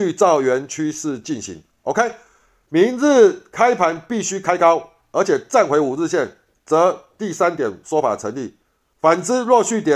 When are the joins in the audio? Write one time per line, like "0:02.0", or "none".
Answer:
none